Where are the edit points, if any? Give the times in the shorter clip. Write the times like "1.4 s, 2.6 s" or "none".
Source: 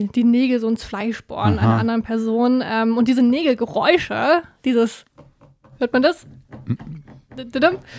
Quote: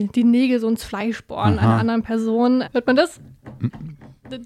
2.6 s